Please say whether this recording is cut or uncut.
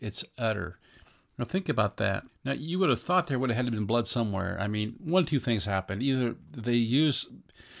cut